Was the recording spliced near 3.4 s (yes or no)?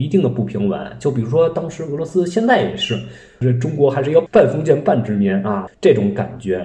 yes